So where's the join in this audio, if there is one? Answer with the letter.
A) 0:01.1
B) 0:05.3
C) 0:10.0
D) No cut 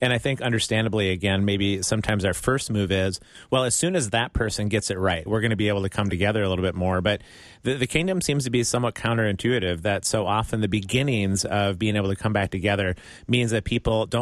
B